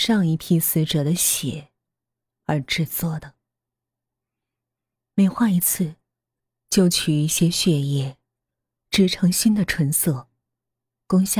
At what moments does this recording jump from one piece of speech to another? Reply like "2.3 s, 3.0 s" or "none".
none